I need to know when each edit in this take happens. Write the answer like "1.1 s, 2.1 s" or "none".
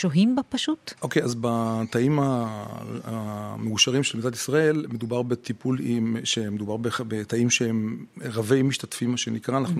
none